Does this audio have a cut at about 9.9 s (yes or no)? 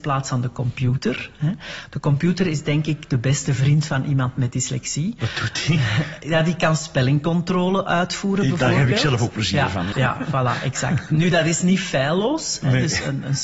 yes